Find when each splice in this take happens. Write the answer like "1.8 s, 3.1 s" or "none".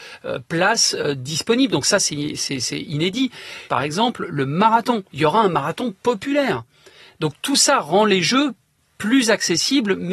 3.7 s